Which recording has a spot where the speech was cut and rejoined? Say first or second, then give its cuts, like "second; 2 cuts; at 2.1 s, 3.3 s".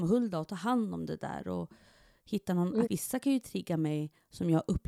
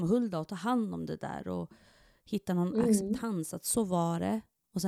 first; 1 cut; at 2.8 s